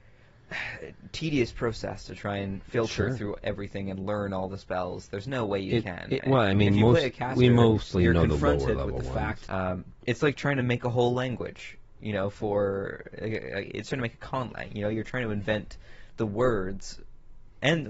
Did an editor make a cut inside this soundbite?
yes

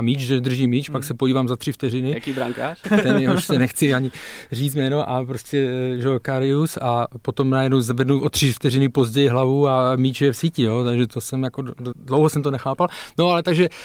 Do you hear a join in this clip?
yes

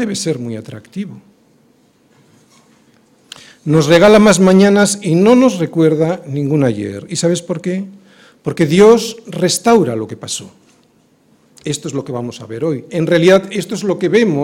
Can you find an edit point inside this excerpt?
no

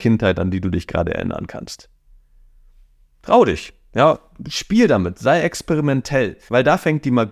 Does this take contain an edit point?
no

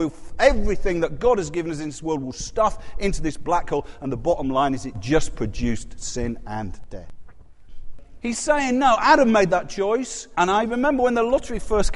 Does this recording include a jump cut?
yes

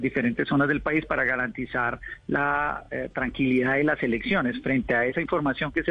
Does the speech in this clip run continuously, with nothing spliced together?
yes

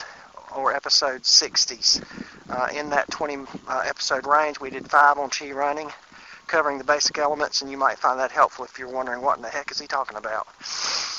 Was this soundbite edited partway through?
no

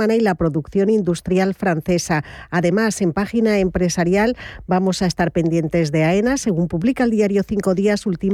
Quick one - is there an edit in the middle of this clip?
no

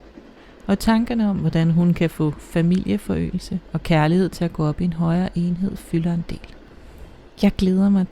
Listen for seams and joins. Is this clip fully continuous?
yes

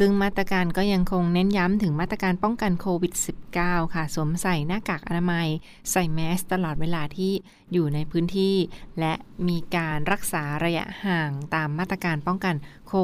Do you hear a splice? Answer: no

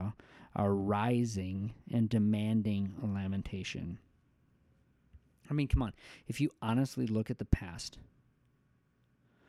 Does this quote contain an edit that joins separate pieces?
no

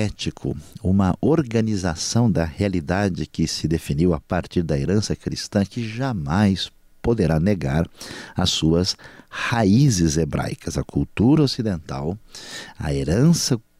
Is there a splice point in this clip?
no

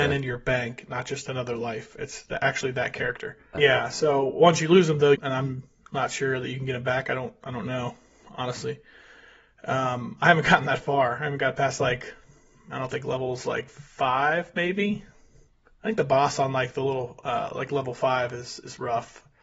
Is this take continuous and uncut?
no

